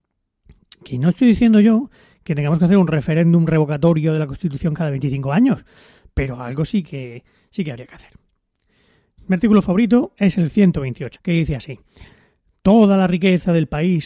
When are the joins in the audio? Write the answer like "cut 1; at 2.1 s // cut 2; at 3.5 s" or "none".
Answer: cut 1; at 9.2 s // cut 2; at 11.2 s